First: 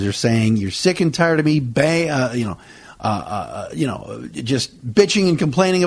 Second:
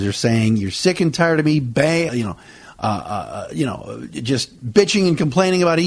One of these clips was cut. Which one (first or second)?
second